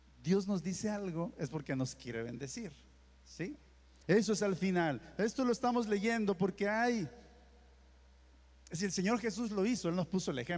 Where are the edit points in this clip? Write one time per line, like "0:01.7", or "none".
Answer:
0:04.0